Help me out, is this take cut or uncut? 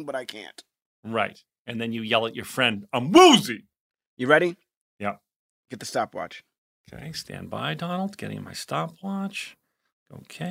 uncut